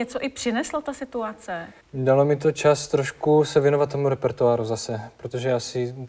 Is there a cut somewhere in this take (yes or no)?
yes